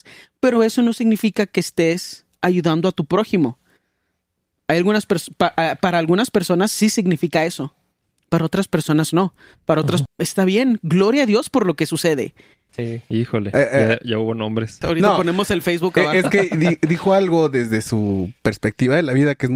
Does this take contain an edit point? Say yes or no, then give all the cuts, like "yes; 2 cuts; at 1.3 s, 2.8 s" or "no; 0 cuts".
yes; 3 cuts; at 10.1 s, 12.7 s, 14.8 s